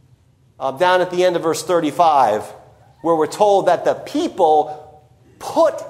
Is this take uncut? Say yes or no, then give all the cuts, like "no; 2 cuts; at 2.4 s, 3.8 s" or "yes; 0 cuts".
yes; 0 cuts